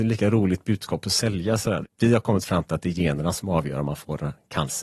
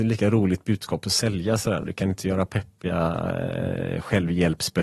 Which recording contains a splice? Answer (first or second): first